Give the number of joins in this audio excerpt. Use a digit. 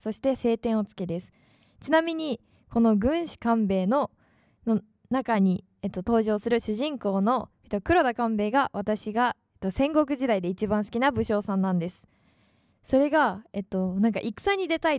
1